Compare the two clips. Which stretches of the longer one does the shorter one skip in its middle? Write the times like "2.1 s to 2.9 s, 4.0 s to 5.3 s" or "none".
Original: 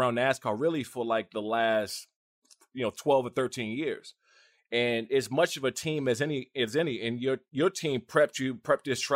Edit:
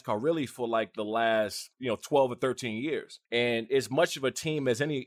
2.1 s to 2.7 s, 4.2 s to 4.7 s